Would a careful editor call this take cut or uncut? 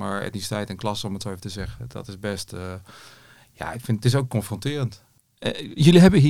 uncut